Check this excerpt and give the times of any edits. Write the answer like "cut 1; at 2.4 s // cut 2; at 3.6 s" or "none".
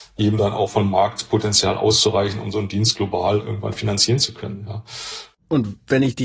cut 1; at 5.3 s

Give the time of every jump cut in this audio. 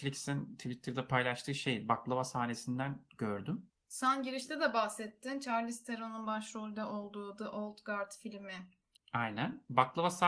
cut 1; at 3.7 s // cut 2; at 8.9 s

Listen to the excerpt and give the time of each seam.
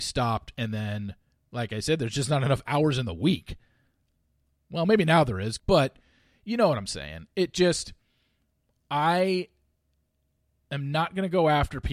cut 1; at 5.6 s

